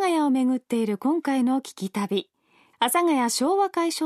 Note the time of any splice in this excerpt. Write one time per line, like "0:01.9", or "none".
0:02.7